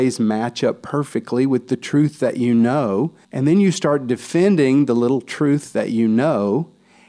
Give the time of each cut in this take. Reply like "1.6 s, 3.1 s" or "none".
3.2 s